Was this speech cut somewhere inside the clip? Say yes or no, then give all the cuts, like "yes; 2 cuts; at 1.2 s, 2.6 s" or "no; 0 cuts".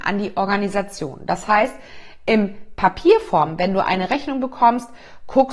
no; 0 cuts